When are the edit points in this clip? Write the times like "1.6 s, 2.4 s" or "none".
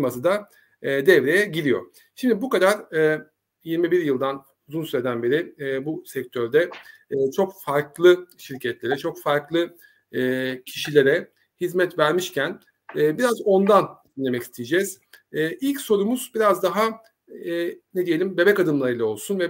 none